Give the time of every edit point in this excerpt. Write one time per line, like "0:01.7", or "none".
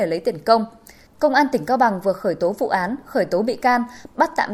0:01.1